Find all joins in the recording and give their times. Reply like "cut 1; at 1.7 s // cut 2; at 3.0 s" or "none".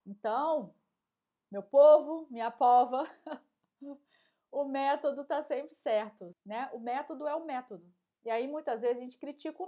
cut 1; at 6.3 s // cut 2; at 8.1 s